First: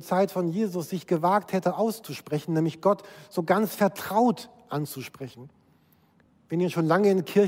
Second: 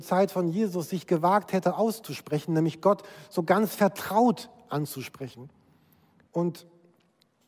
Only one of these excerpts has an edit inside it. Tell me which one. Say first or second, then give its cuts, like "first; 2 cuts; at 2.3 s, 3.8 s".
second; 1 cut; at 6.3 s